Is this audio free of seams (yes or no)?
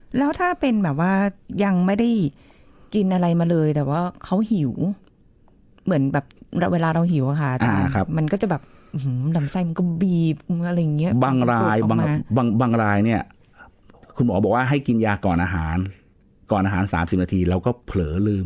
yes